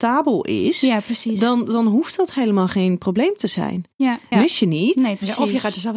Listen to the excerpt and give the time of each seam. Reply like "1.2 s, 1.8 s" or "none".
4.3 s